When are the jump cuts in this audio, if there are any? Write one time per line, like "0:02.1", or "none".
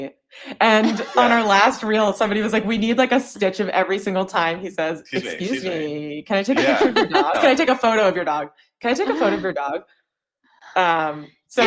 0:07.3